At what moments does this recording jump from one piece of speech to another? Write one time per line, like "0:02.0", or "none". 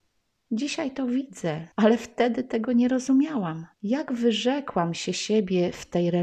0:01.7
0:03.7